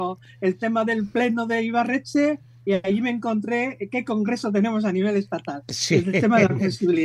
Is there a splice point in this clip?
no; 0 cuts

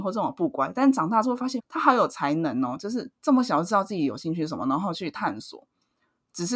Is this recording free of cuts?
no; 1 cut; at 1.6 s

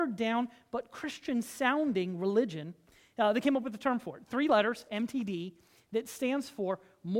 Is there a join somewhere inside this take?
no; 0 cuts

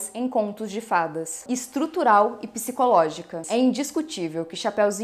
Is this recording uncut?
no; 2 cuts; at 1.5 s, 3.4 s

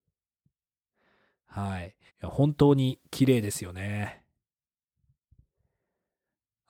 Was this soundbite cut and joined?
yes; 1 cut; at 2.1 s

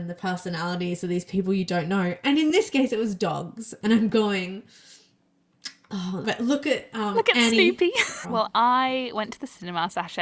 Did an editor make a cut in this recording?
yes; 2 cuts; at 6.2 s, 8.2 s

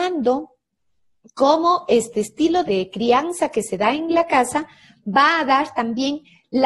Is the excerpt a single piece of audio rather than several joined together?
no; 1 cut; at 2.7 s

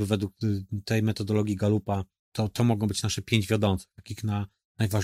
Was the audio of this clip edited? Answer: yes; 1 cut; at 2.2 s

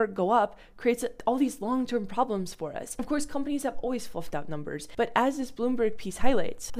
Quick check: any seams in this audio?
no; 0 cuts

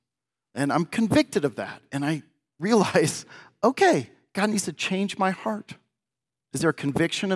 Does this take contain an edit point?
yes; 1 cut; at 6.3 s

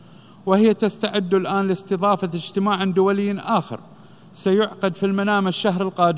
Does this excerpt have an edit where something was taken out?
no; 0 cuts

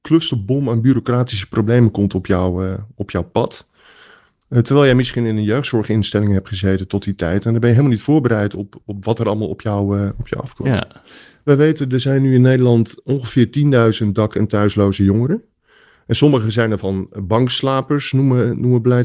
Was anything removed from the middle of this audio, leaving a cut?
no; 0 cuts

